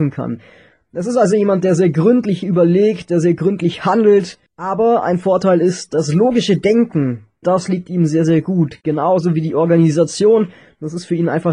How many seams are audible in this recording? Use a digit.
2